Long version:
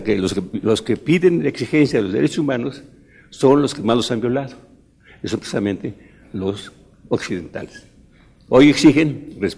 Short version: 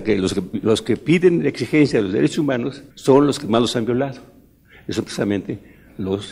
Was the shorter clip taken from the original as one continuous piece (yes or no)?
no